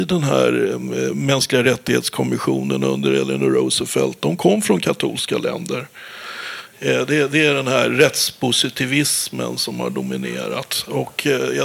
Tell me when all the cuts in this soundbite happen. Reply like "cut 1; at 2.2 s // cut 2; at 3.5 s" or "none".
cut 1; at 6.7 s

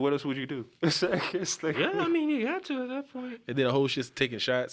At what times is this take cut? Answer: none

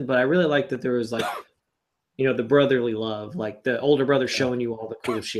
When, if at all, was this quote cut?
none

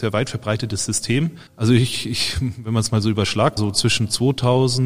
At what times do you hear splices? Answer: cut 1; at 1.5 s // cut 2; at 3.6 s

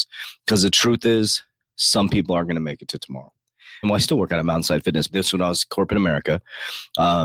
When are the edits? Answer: cut 1; at 3.8 s // cut 2; at 5.1 s

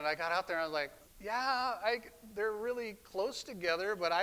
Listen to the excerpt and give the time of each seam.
cut 1; at 1.0 s

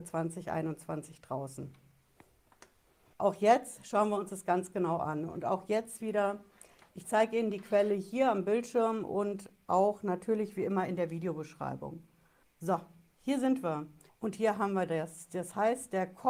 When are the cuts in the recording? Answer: cut 1; at 3.1 s // cut 2; at 12.4 s // cut 3; at 14.1 s

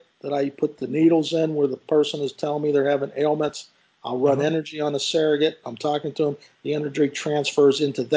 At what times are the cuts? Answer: cut 1; at 5.6 s

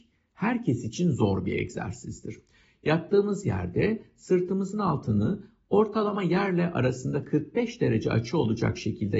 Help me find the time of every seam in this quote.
cut 1; at 2.6 s

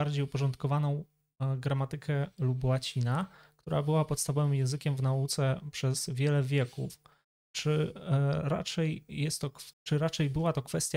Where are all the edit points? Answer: cut 1; at 9.7 s

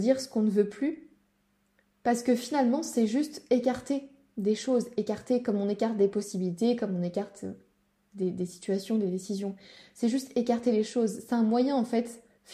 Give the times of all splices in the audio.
none

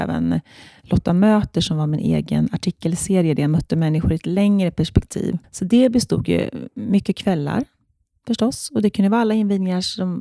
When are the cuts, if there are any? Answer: cut 1; at 5.4 s

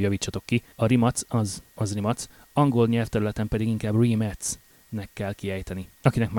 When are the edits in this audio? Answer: none

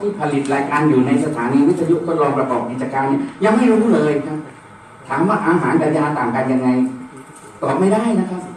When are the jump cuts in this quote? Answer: none

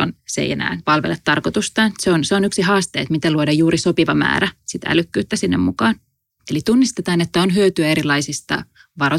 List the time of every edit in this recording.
cut 1; at 6.4 s

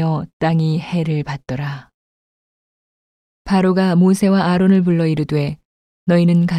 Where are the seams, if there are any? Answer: none

